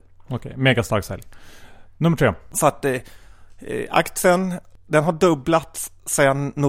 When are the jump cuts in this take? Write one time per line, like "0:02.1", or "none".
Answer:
0:02.5